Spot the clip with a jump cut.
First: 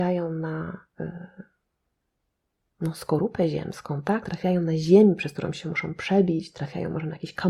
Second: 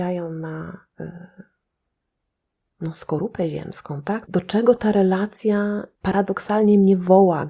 second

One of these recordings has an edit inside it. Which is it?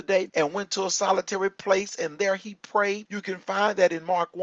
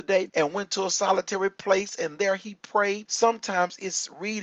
second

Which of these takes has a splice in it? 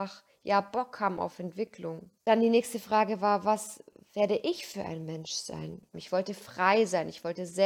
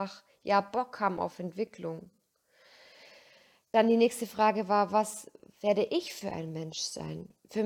first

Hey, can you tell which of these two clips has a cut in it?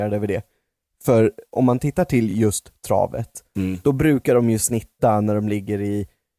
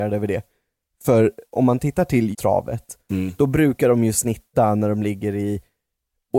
second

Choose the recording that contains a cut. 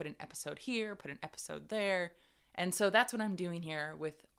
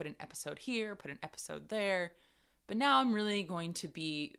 first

